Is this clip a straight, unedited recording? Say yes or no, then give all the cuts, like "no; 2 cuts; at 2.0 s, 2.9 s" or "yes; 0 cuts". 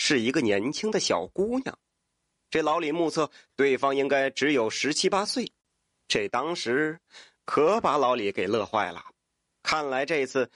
yes; 0 cuts